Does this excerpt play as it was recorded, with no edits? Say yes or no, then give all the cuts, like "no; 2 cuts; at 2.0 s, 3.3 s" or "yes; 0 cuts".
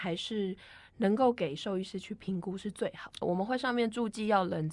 no; 1 cut; at 3.2 s